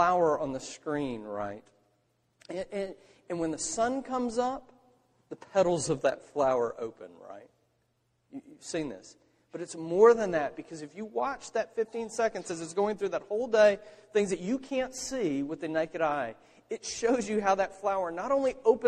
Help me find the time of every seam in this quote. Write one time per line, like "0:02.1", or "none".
none